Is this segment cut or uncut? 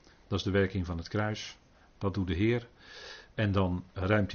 uncut